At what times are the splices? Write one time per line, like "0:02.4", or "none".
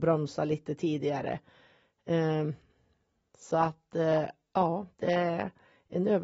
none

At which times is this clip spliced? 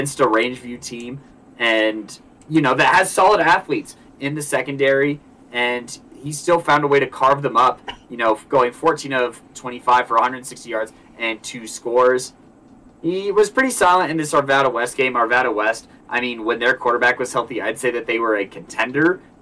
none

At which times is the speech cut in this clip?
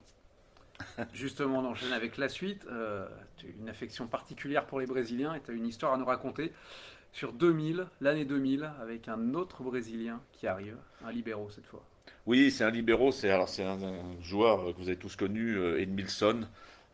none

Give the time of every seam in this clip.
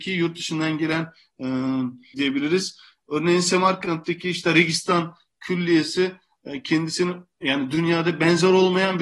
0:02.1

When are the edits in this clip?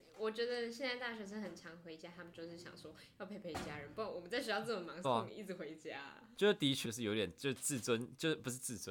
0:05.0
0:06.8

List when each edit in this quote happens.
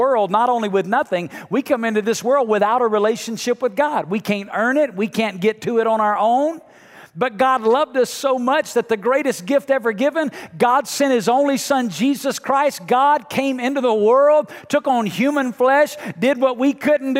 none

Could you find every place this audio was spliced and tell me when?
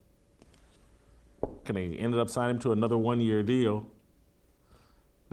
0:01.6

